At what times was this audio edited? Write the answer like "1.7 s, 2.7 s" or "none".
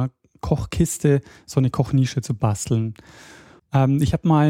3.6 s